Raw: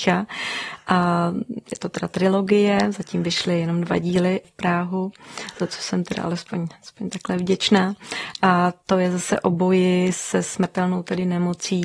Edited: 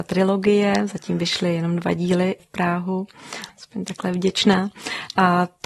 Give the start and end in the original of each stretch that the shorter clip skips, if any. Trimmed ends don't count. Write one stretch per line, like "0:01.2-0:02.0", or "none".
0:05.5-0:06.7